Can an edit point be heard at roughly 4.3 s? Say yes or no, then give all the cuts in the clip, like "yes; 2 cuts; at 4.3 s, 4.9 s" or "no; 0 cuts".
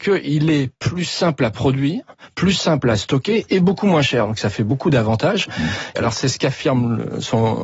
no; 1 cut; at 6.0 s